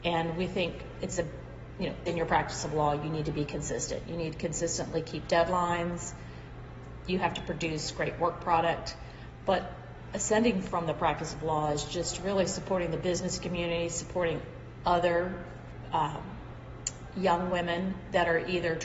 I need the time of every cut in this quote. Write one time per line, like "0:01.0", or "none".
0:02.1